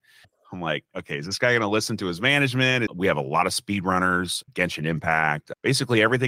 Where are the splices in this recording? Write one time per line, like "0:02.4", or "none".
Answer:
0:02.9
0:04.4